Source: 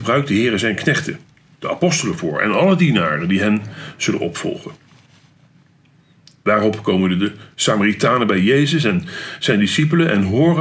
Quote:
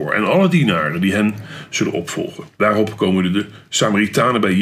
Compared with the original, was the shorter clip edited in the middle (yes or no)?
yes